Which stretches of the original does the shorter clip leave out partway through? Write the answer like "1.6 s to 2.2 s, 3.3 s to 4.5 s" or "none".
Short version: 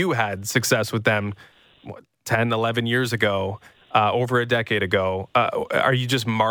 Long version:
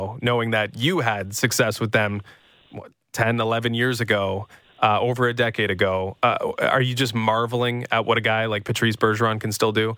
none